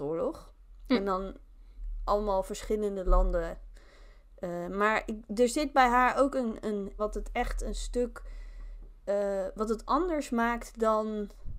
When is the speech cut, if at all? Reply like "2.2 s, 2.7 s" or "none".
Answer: 7.0 s